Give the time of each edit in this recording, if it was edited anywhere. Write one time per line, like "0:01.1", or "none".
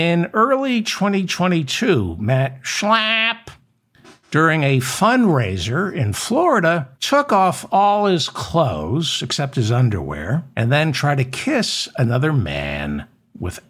0:06.9
0:10.5

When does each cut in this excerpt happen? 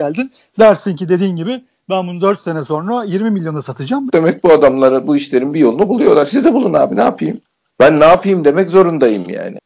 0:04.1

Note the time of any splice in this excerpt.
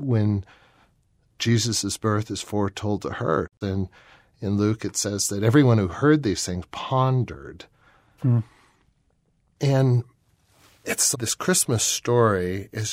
0:03.6
0:08.2
0:11.1

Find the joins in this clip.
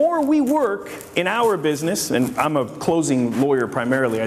none

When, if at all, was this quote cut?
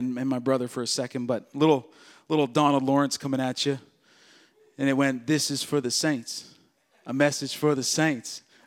none

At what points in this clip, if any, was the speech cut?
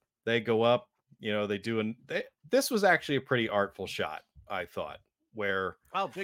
none

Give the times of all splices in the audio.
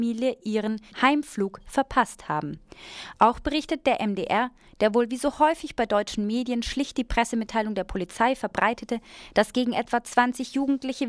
0:00.9

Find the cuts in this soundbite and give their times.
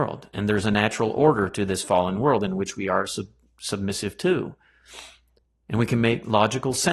none

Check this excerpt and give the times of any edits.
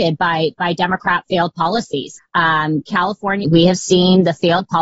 0:02.2
0:03.4

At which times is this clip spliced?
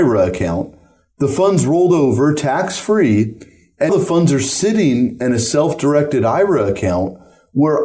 0:03.9

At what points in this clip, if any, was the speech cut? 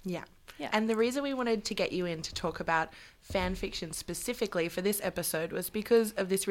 none

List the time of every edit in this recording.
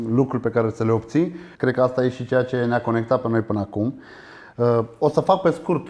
0:01.6

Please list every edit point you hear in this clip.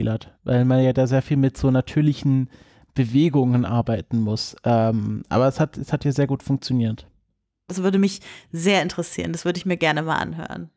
0:07.7

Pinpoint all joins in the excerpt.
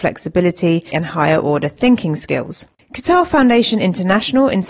0:00.9

